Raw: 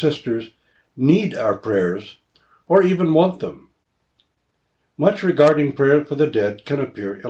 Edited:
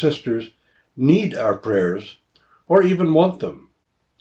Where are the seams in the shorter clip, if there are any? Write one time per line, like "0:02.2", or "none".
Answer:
none